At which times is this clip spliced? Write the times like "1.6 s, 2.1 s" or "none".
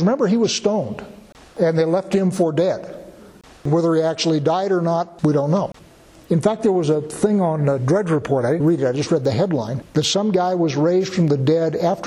8.6 s, 9.9 s